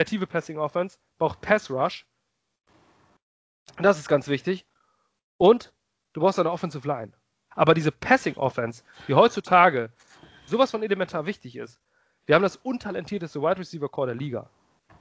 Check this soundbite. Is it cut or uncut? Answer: cut